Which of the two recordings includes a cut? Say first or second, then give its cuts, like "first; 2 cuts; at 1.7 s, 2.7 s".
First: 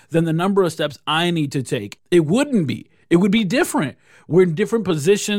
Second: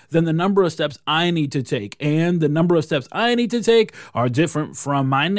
first; 1 cut; at 2.0 s